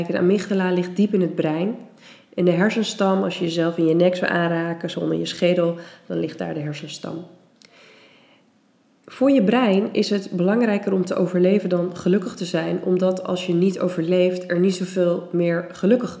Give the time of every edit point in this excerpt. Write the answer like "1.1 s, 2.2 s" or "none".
none